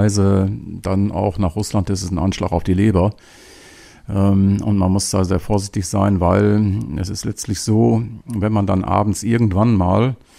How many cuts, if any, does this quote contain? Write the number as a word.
zero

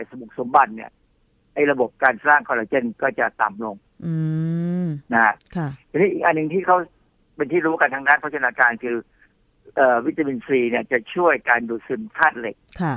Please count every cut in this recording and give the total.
zero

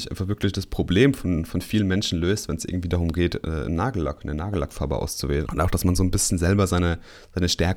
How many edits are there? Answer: one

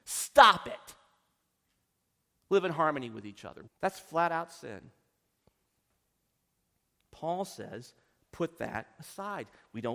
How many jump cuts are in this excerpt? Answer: one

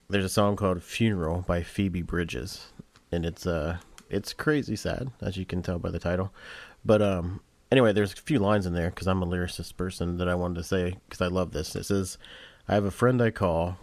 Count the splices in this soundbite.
zero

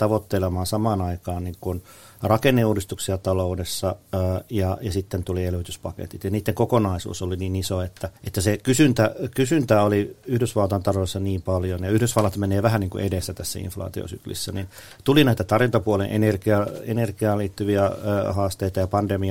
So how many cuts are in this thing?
one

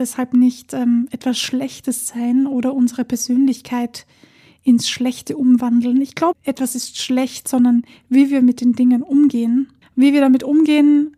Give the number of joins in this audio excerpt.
two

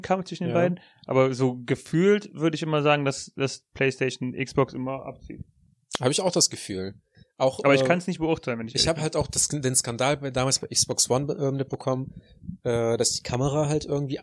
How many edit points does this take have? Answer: zero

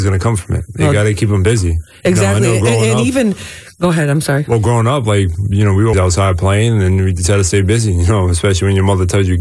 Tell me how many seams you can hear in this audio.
one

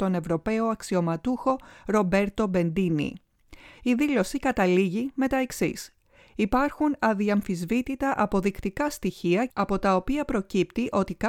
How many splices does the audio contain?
one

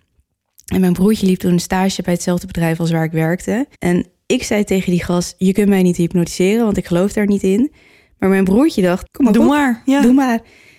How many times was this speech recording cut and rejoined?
two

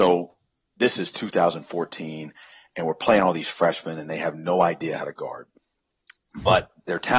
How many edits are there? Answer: zero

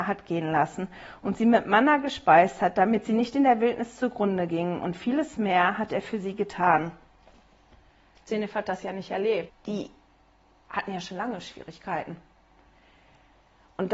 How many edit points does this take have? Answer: two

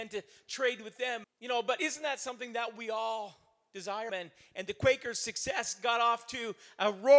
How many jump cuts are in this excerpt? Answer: two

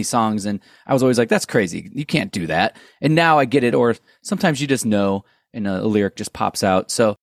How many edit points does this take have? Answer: one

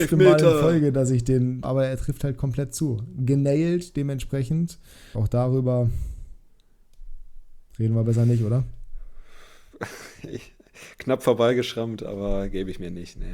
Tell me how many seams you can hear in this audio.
two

